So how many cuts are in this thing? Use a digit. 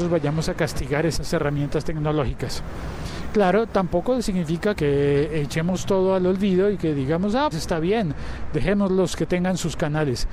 1